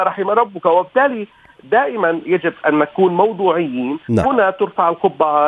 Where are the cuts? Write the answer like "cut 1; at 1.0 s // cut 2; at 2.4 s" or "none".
cut 1; at 4.2 s